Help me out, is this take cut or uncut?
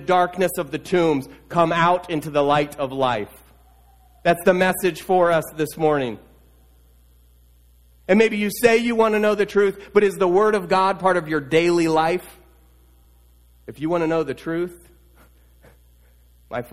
uncut